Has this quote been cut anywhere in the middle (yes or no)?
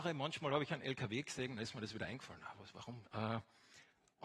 yes